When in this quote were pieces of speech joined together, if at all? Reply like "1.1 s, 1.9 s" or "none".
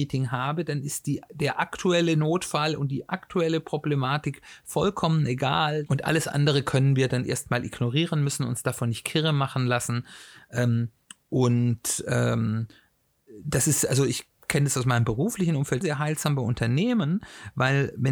5.9 s, 15.8 s